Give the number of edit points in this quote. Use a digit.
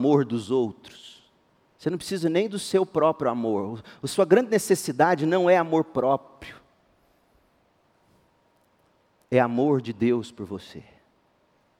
1